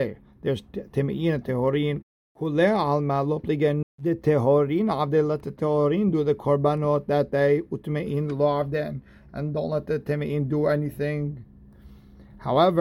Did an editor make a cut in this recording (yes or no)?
yes